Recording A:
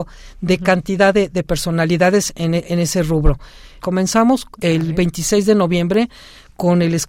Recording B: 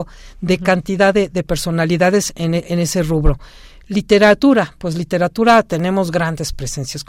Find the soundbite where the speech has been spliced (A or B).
A